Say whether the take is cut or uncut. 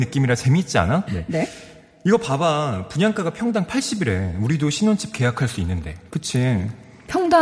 cut